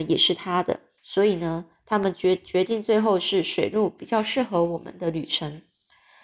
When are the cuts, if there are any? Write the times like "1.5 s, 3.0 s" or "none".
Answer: 1.0 s